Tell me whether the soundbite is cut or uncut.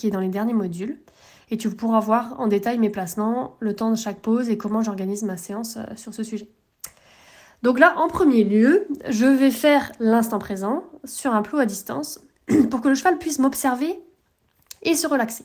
uncut